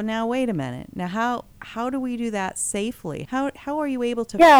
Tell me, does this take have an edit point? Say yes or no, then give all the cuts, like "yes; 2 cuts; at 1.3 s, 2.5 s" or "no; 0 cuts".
yes; 1 cut; at 3.2 s